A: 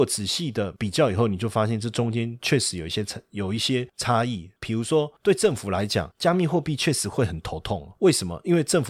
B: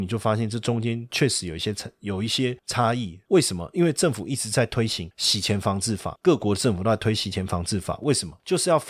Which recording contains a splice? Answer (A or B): B